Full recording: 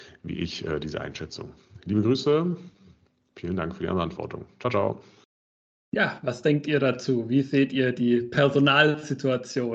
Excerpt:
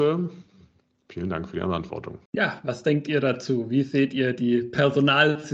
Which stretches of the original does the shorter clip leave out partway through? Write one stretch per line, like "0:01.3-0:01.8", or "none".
0:04.5-0:05.8